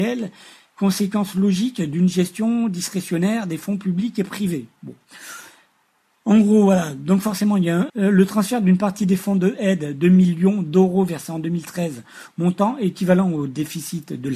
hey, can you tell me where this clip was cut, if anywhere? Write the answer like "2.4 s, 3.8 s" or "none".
7.9 s

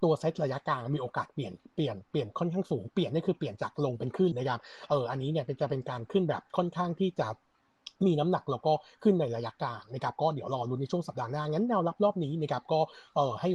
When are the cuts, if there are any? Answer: 4.3 s

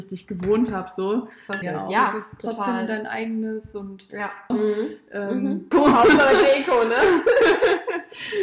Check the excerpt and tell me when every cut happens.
1.6 s, 4.5 s, 5.7 s

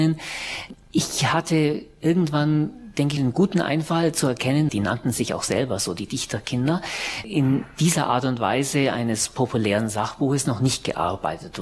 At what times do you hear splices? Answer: 3.2 s, 4.7 s

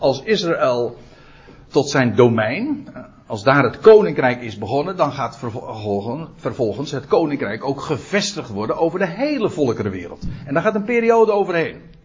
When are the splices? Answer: 1.7 s

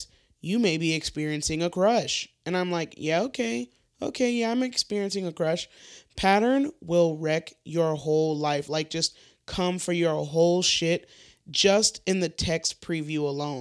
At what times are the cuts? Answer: none

